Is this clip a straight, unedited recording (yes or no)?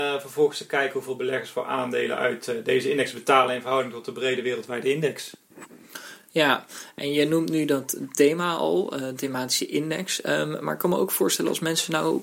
yes